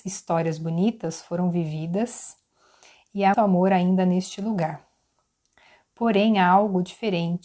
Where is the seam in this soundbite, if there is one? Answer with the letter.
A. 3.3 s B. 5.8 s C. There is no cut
A